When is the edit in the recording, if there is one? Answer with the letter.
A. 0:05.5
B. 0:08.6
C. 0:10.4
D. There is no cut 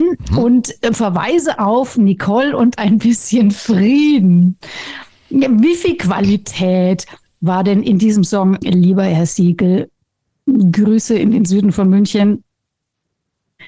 B